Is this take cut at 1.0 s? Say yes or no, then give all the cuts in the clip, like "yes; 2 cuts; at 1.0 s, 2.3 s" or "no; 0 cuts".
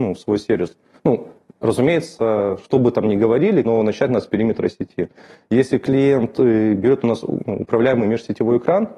no; 1 cut; at 3.6 s